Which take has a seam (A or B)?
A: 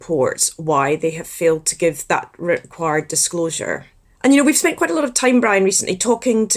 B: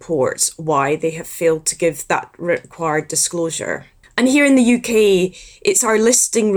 B